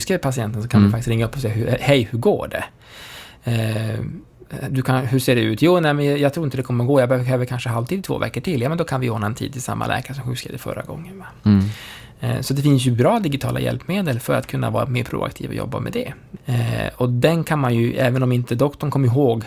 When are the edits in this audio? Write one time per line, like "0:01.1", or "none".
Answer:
0:16.4